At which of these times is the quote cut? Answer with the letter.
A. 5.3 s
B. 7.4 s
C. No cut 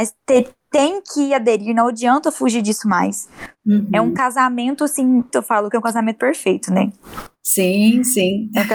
A